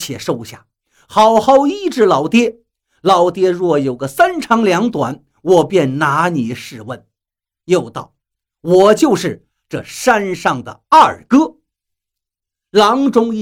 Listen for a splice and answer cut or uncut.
uncut